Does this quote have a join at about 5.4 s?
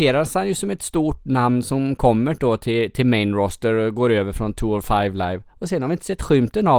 no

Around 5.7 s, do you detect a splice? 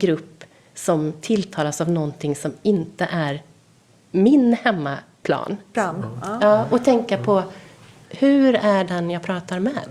yes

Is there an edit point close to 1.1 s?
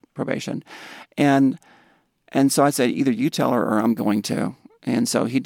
no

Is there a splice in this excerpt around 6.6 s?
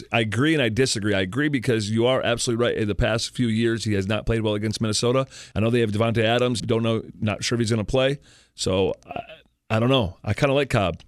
yes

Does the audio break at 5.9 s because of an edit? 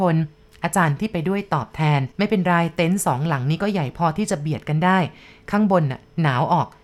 no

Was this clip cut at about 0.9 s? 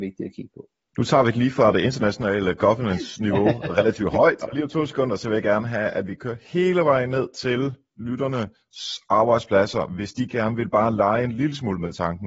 no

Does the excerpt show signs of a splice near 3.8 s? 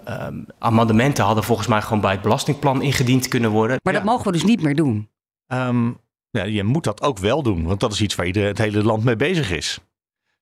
yes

